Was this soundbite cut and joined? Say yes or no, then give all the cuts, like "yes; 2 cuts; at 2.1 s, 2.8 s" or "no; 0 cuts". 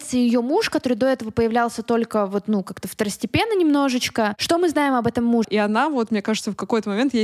yes; 1 cut; at 5.4 s